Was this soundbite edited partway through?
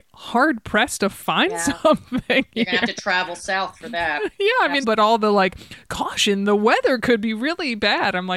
yes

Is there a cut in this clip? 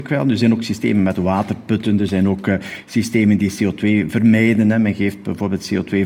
no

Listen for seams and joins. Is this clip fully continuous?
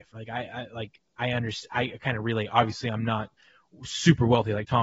yes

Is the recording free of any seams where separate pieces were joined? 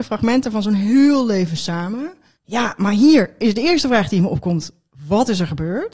no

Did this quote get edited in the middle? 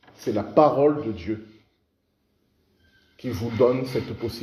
no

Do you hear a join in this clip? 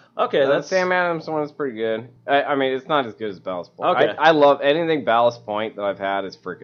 no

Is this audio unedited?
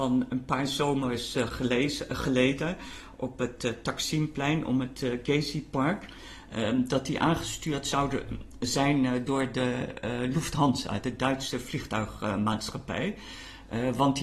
yes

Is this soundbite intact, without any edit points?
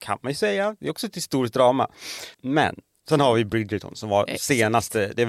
no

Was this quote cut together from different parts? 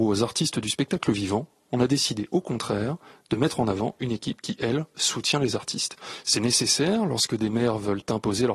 yes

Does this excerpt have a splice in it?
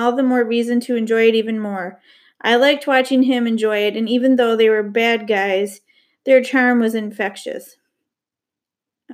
no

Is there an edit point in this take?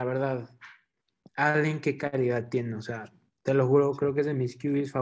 no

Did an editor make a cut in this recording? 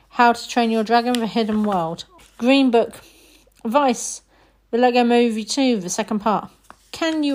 yes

